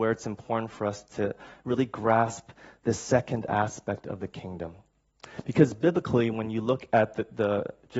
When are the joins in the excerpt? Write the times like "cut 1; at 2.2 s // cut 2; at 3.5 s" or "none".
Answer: none